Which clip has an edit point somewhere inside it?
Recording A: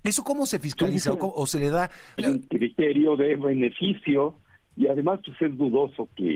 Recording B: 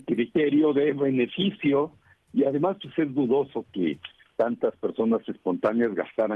A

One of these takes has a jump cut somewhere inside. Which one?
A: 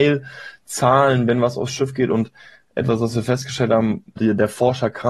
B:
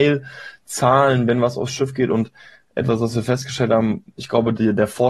A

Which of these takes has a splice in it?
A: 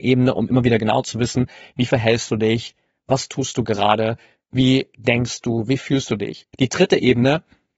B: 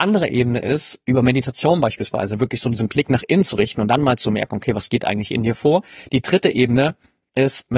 A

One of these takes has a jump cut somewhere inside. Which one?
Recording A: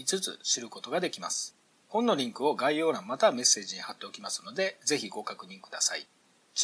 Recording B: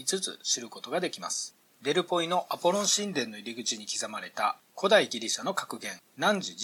B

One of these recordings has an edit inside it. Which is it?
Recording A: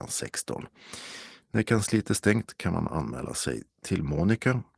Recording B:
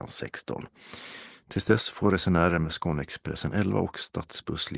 A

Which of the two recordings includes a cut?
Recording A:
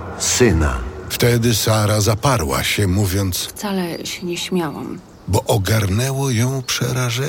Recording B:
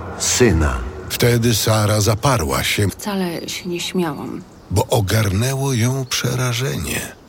B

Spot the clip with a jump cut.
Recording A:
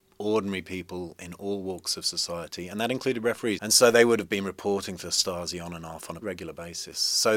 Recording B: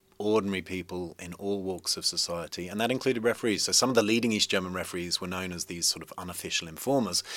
A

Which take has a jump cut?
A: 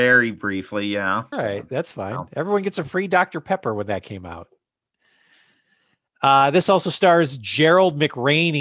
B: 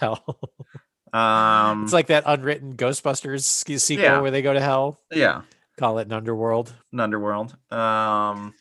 A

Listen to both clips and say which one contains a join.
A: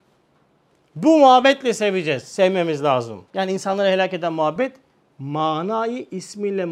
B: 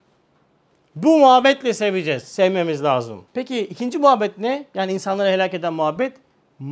A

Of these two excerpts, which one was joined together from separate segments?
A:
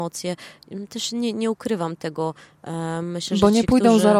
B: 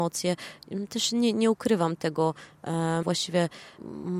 B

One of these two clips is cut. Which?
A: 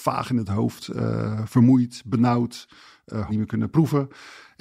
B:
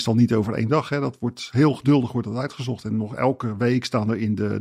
A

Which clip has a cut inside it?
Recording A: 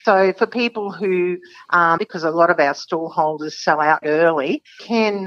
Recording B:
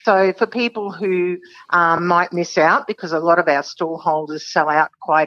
A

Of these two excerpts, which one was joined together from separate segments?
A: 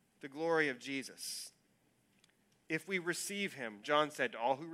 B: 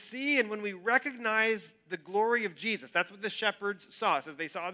A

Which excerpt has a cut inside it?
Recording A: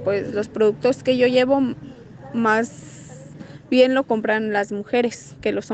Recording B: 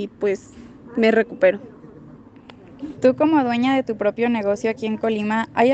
B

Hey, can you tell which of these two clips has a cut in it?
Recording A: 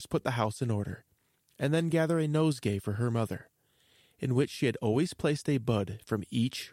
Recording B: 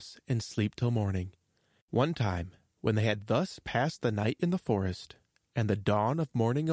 B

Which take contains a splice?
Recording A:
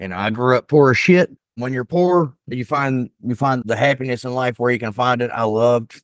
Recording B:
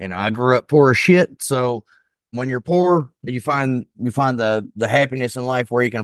A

